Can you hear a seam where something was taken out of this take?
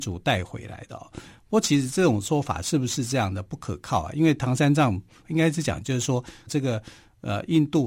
yes; 2 cuts; at 5.2 s, 6.5 s

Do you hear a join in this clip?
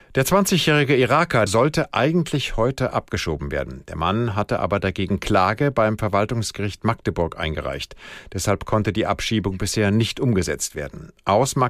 yes; 1 cut; at 1.5 s

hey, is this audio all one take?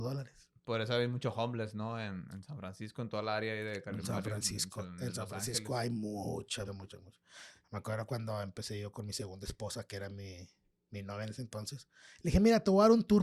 no; 1 cut; at 6.7 s

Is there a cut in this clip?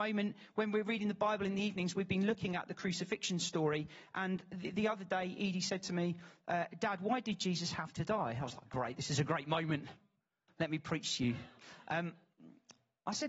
no; 0 cuts

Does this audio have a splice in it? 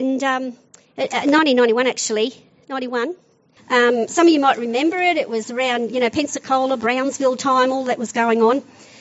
yes; 1 cut; at 3.6 s

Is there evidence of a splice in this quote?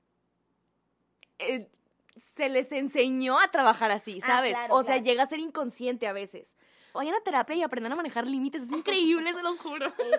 yes; 1 cut; at 6.9 s

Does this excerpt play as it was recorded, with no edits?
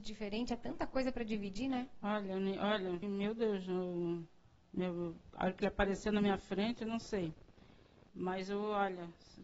no; 2 cuts; at 3.0 s, 8.1 s

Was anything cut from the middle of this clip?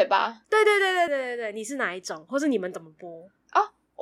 yes; 1 cut; at 1.1 s

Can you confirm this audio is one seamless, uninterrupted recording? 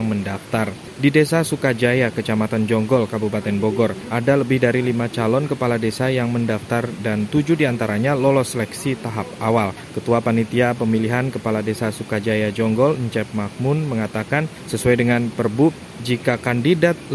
yes; 0 cuts

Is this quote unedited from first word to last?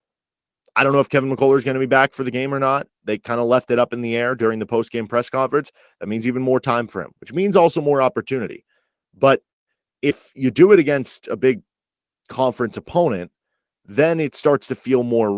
yes; 0 cuts

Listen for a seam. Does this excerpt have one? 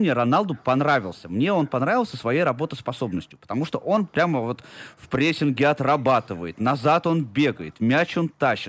no; 0 cuts

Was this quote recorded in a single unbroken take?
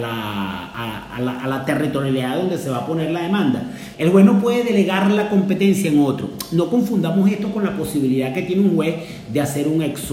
no; 1 cut; at 3.9 s

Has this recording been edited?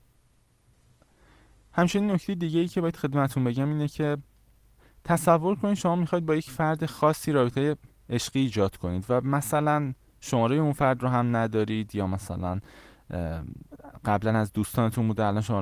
no; 0 cuts

